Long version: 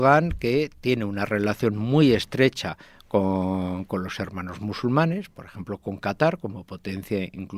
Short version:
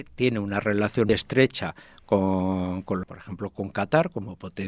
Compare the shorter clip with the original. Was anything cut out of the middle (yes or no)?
yes